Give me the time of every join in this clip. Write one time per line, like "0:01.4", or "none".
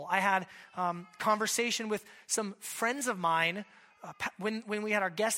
none